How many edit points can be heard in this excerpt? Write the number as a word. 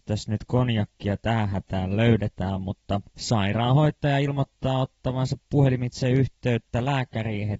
one